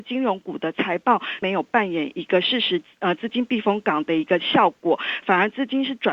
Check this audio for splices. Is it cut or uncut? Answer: cut